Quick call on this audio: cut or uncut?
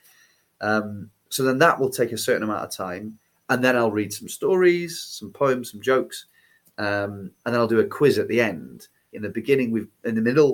cut